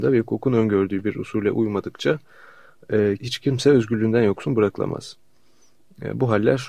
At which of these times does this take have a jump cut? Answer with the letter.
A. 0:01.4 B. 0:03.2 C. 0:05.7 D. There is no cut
B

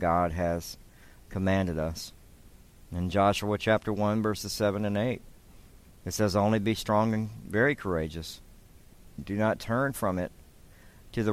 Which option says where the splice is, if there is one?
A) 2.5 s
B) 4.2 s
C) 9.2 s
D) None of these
C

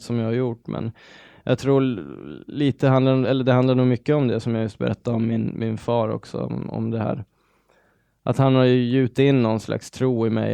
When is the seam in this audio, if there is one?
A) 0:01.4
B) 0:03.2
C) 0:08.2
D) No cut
D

